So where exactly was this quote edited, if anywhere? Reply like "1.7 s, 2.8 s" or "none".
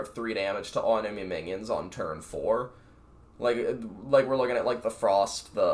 none